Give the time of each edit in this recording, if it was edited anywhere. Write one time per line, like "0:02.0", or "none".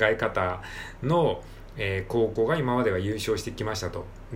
none